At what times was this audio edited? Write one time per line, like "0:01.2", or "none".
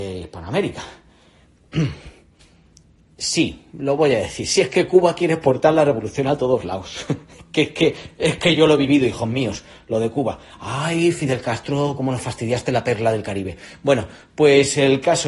none